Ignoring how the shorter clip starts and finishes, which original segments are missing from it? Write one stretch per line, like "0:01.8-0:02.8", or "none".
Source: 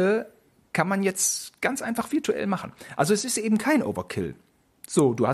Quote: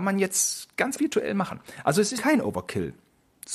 0:01.8-0:02.1
0:03.3-0:03.6